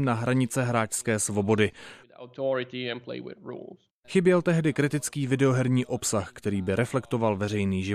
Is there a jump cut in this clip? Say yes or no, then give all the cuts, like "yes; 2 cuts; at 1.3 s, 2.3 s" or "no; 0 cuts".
yes; 2 cuts; at 2.0 s, 4.0 s